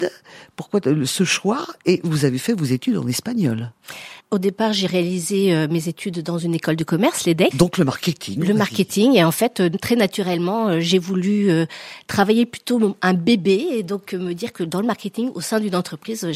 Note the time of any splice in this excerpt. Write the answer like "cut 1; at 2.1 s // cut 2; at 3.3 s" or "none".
cut 1; at 4.2 s // cut 2; at 7.5 s